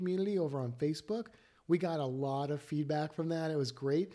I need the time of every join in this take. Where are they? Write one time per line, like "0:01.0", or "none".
none

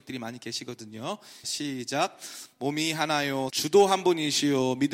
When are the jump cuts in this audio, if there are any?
0:01.4
0:03.5

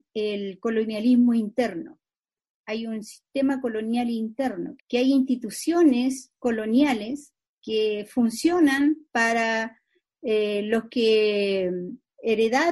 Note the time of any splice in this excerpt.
0:04.8

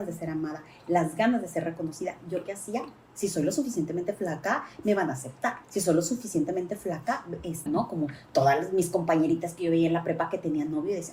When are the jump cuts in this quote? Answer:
0:03.0
0:05.6
0:07.7

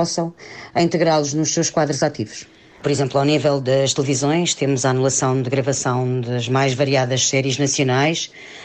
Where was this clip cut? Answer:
0:02.8

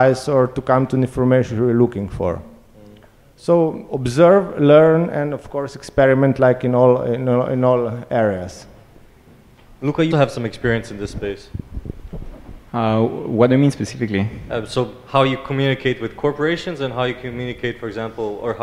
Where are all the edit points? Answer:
0:10.1

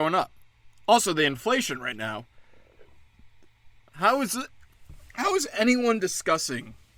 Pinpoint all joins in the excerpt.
0:03.8

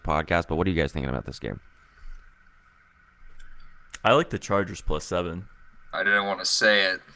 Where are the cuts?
0:05.9

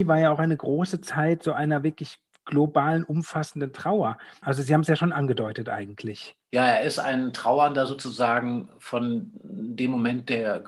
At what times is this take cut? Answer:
0:04.4

